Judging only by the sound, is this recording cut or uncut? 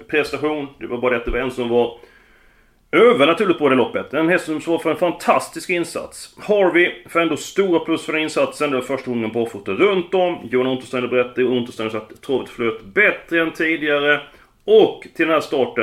uncut